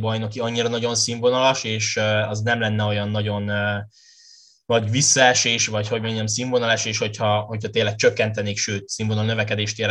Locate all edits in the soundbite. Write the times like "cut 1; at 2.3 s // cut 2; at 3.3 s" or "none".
none